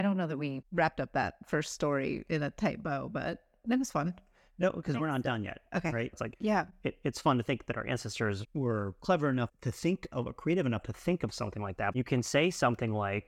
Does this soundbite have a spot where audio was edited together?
yes; 2 cuts; at 6.1 s, 11.9 s

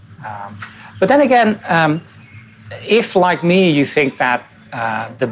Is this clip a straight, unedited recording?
yes; 0 cuts

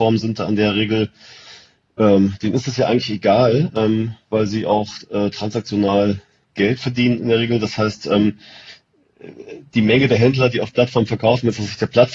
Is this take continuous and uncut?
yes; 0 cuts

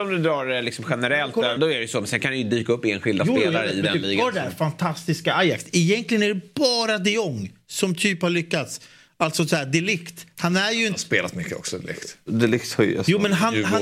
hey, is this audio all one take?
no; 1 cut; at 1.6 s

